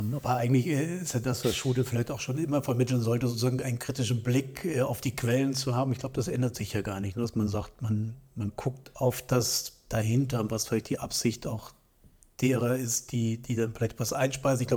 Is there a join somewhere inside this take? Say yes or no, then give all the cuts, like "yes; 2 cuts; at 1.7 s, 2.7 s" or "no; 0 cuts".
no; 0 cuts